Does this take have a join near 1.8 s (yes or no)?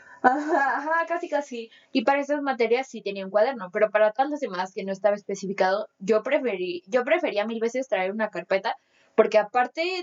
yes